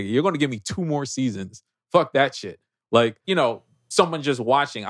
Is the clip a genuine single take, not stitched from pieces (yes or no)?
no